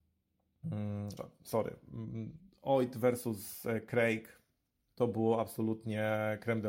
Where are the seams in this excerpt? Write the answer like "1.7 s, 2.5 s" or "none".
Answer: 1.2 s